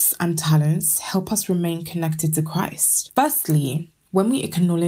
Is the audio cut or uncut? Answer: uncut